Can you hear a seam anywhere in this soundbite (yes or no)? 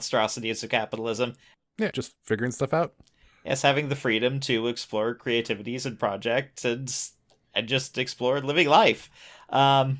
yes